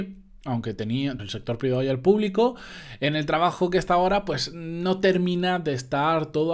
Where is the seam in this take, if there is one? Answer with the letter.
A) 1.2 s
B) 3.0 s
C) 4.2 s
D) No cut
A